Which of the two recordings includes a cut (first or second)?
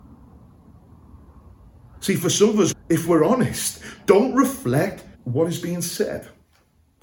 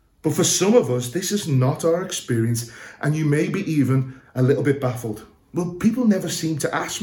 first